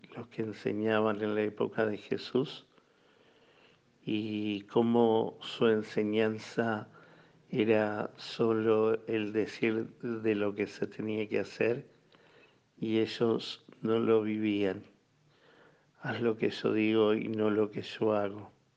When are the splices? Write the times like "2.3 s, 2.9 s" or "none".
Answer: none